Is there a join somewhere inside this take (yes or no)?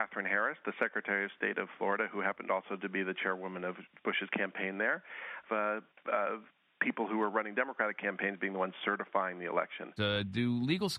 yes